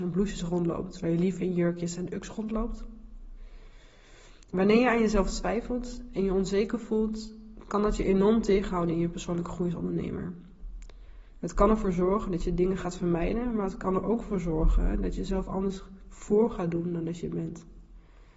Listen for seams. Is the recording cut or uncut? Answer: uncut